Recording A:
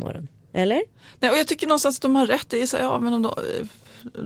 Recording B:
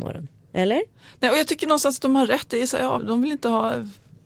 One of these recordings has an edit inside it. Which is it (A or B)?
B